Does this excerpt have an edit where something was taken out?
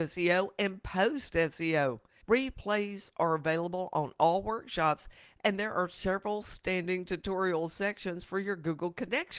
yes; 1 cut; at 2.2 s

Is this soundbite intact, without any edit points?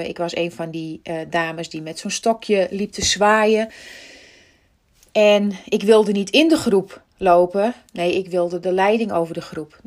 yes; 0 cuts

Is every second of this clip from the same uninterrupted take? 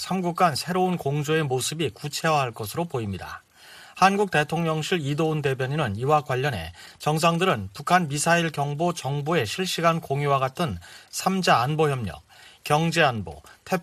no; 1 cut; at 12.6 s

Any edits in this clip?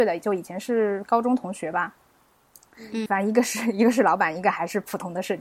yes; 1 cut; at 3.1 s

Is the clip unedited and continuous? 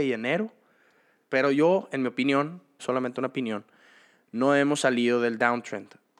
no; 2 cuts; at 1.2 s, 2.8 s

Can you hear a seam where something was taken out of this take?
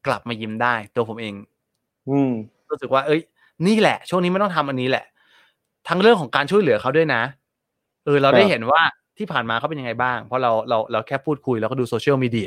no; 0 cuts

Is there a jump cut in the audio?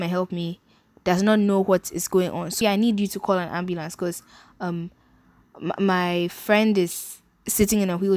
yes; 1 cut; at 2.6 s

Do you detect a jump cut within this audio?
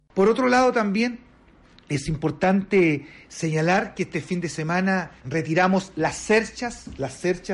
yes; 1 cut; at 5.2 s

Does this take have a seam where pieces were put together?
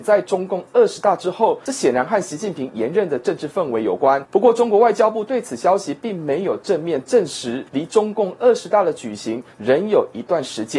yes; 2 cuts; at 4.2 s, 7.7 s

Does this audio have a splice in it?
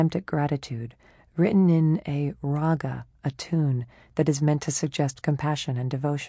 no; 0 cuts

